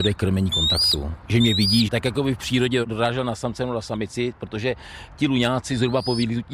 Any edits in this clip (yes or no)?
yes